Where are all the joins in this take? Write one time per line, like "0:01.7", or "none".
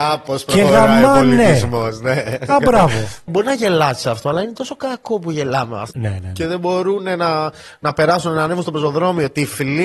0:03.3
0:05.9